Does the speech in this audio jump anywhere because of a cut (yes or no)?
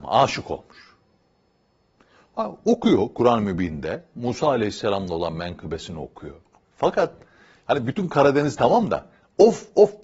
yes